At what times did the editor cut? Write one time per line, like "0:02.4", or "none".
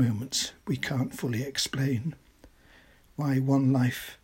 none